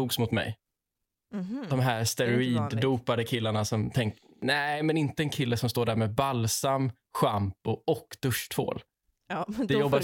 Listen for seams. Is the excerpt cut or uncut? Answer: uncut